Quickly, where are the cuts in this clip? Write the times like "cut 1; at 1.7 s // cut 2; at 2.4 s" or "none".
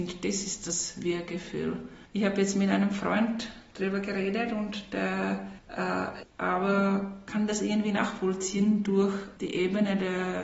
cut 1; at 2.1 s // cut 2; at 6.2 s